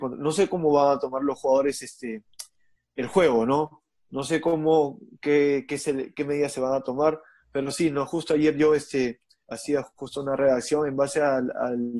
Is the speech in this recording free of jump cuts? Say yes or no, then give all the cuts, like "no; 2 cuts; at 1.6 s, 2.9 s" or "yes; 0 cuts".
yes; 0 cuts